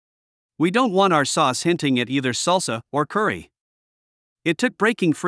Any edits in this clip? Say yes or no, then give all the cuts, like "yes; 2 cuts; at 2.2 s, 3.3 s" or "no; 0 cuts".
no; 0 cuts